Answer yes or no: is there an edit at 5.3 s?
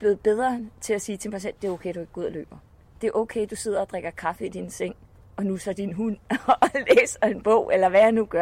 yes